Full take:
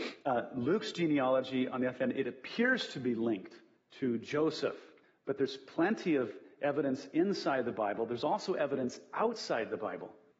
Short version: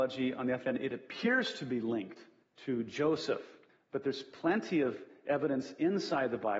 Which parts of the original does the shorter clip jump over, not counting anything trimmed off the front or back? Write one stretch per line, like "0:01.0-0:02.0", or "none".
none